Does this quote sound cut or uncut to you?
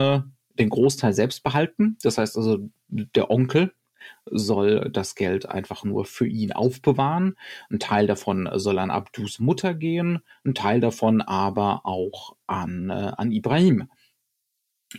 uncut